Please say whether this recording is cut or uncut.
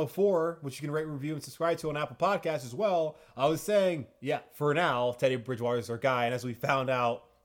uncut